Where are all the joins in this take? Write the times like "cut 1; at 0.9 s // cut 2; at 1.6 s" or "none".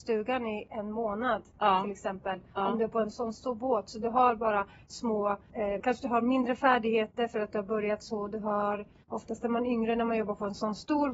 cut 1; at 5.8 s